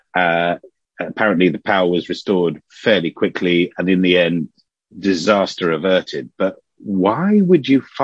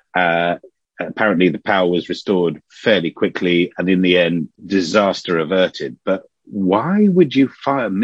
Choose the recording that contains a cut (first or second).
second